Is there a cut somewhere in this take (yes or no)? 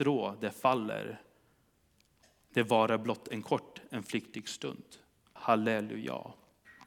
yes